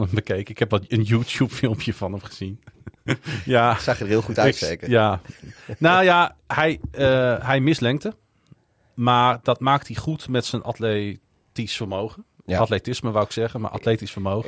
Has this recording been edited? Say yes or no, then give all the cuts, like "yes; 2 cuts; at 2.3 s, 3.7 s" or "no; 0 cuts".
no; 0 cuts